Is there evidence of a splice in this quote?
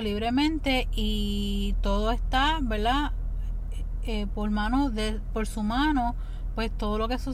no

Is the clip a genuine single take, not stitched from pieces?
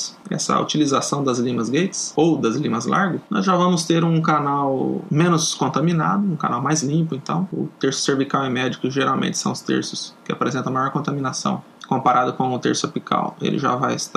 yes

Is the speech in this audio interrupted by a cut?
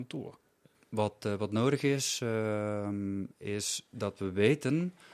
no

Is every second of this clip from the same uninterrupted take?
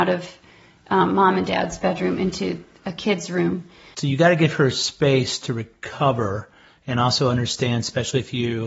no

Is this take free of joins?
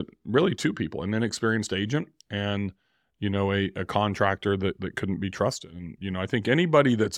yes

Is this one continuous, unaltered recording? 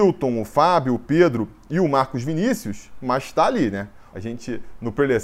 no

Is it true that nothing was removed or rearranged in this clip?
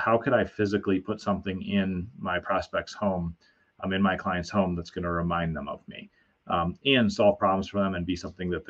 yes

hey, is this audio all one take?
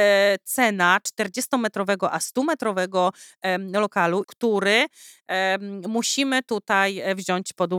no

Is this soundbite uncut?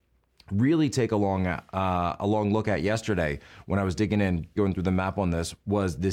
no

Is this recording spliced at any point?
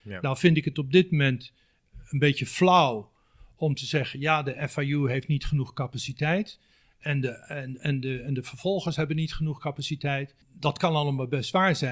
yes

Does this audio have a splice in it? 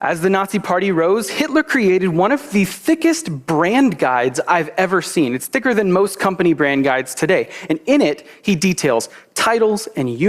no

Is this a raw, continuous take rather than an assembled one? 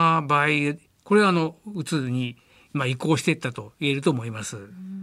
yes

